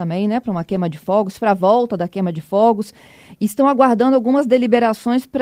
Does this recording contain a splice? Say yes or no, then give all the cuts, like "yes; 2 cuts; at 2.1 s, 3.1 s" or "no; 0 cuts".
no; 0 cuts